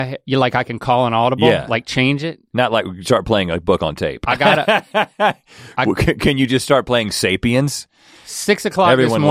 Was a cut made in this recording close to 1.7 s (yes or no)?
no